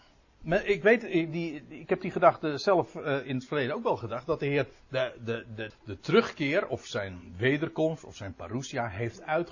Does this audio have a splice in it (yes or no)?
yes